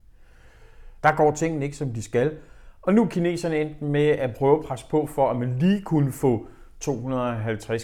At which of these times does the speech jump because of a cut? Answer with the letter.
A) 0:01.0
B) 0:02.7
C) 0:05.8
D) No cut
A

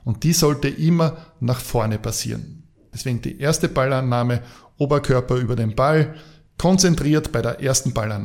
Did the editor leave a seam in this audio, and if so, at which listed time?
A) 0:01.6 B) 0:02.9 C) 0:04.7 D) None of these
B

